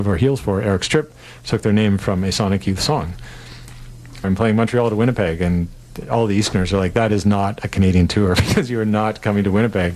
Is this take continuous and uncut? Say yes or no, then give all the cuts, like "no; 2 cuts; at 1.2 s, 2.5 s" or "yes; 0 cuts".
no; 1 cut; at 4.2 s